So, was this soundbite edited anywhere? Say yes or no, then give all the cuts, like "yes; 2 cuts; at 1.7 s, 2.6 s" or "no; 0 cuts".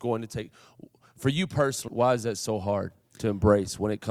yes; 1 cut; at 1.9 s